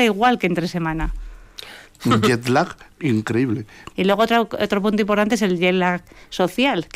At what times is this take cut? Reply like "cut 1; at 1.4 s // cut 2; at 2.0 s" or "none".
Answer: cut 1; at 1.8 s // cut 2; at 3.9 s